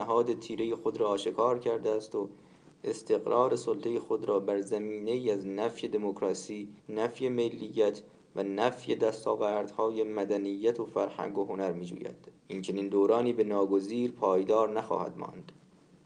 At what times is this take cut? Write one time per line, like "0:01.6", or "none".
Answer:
0:06.8
0:12.4